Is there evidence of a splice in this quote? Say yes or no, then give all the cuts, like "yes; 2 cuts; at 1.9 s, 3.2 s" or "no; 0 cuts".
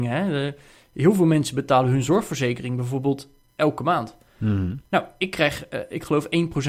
no; 0 cuts